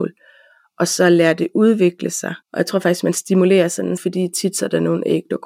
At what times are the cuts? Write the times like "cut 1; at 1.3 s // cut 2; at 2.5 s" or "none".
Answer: cut 1; at 2.4 s // cut 2; at 4.0 s